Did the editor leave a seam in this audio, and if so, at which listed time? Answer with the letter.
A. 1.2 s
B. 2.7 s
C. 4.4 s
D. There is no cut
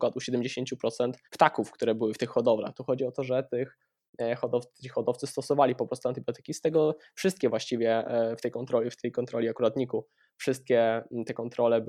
A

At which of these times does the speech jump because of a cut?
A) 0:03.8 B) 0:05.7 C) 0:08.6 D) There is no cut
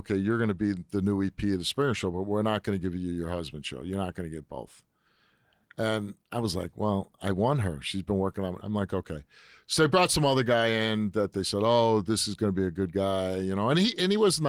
C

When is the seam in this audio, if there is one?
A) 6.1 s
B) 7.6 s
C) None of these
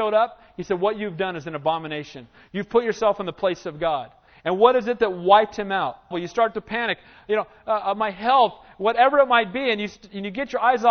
A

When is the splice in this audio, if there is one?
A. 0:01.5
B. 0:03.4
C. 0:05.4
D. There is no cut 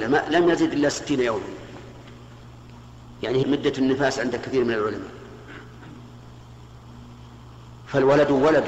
B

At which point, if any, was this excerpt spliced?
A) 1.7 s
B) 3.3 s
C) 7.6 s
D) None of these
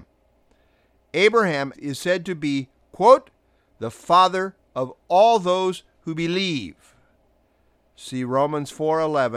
A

